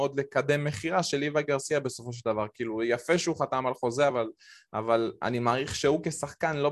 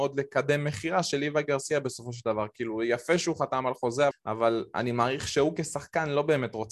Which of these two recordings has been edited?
second; 1 cut; at 4.1 s

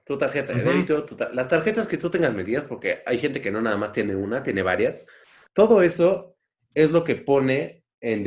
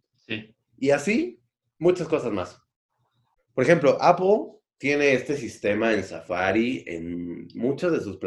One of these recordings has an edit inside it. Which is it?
second; 1 cut; at 3.3 s

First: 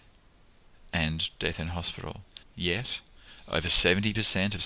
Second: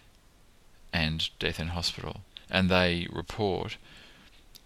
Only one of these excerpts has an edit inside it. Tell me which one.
first; 1 cut; at 2.4 s

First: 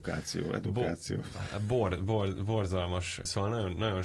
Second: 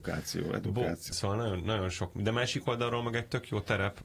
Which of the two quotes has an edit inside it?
second; 1 cut; at 1.1 s

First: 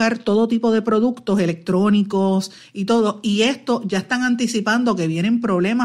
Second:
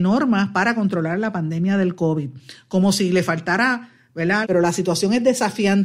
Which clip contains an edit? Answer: second; 1 cut; at 4.4 s

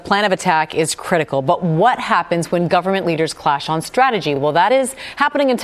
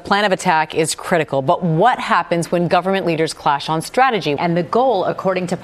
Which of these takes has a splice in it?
second; 1 cut; at 4.4 s

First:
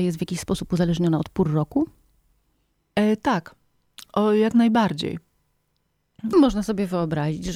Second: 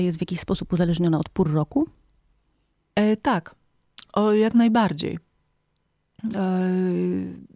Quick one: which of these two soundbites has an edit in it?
first; 1 cut; at 6.3 s

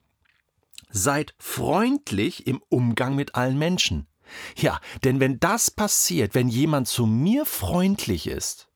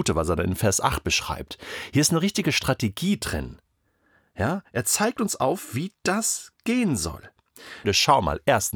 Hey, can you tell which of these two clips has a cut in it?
second; 1 cut; at 7.8 s

